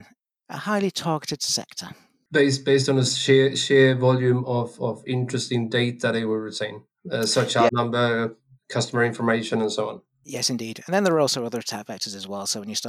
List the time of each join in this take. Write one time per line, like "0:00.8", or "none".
0:07.7